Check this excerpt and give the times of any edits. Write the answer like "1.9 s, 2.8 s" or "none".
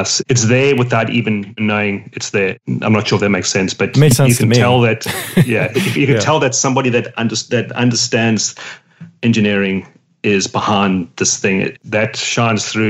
11.8 s